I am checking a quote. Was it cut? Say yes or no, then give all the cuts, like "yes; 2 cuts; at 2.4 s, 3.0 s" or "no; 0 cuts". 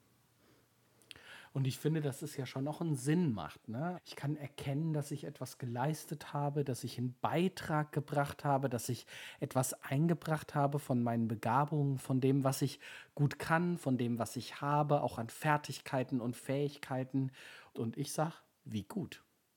yes; 2 cuts; at 3.9 s, 17.7 s